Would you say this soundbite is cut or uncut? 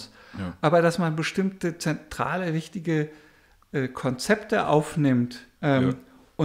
cut